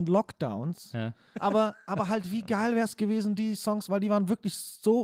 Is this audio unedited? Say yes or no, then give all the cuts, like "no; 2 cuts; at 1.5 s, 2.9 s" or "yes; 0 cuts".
no; 1 cut; at 1.3 s